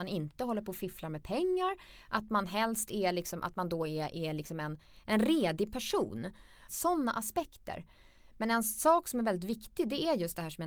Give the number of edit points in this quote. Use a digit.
1